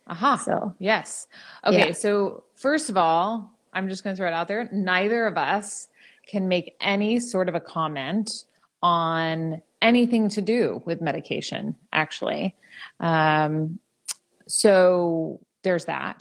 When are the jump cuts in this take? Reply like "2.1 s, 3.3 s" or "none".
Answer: none

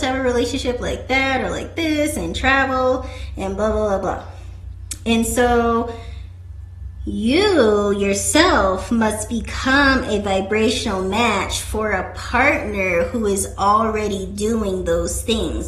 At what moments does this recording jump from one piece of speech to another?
none

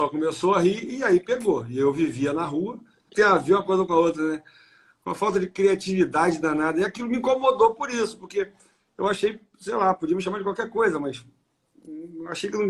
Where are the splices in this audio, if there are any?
3.1 s

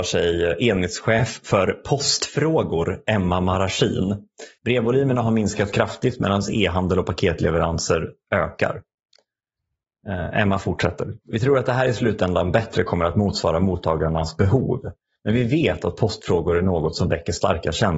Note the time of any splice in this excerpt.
4.6 s

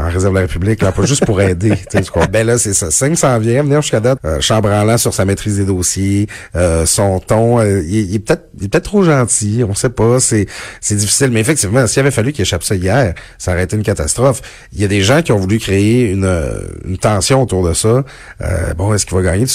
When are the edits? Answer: 2.3 s, 4.2 s

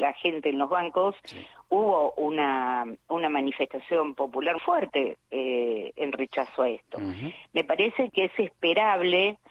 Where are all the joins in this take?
4.6 s, 8.1 s

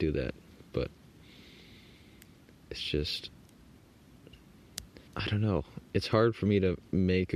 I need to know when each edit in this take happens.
5.1 s

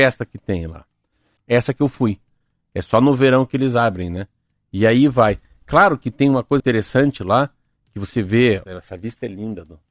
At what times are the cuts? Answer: 1.4 s, 6.6 s, 8.6 s

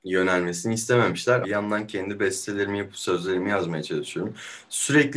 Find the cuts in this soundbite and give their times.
1.4 s

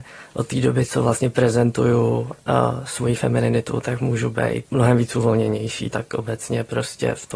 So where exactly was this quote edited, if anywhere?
4.7 s, 5.9 s

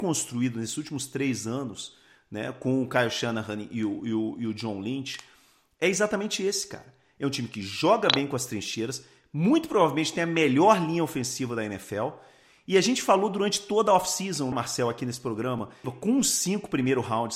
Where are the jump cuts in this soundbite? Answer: 14.5 s, 15.8 s

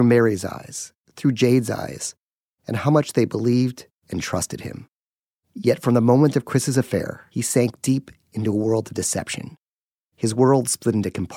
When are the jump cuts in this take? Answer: none

